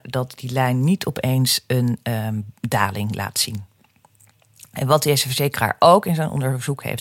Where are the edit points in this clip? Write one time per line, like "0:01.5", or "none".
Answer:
none